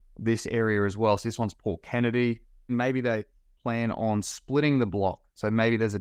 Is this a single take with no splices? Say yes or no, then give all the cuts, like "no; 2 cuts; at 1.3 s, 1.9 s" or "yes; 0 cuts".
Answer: no; 1 cut; at 2.7 s